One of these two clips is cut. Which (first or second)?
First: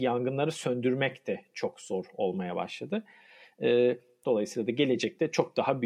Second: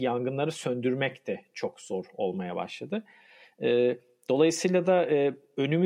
first